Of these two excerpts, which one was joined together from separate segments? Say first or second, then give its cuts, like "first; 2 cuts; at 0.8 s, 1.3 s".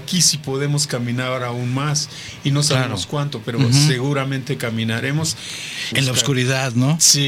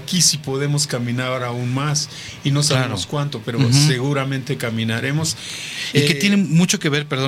first; 1 cut; at 5.9 s